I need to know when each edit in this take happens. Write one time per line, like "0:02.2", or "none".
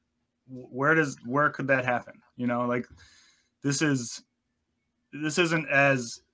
none